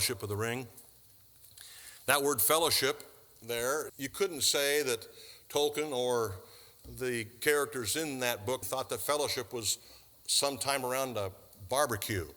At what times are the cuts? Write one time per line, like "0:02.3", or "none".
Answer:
0:03.9
0:08.6